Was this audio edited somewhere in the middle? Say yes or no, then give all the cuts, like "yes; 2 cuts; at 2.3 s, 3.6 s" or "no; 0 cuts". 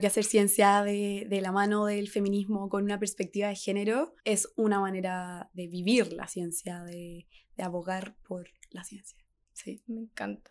yes; 1 cut; at 4.2 s